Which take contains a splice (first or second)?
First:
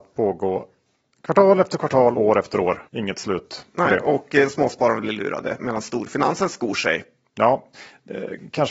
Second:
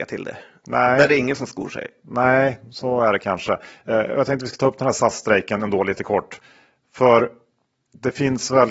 first